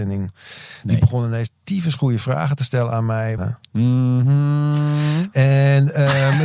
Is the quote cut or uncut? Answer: cut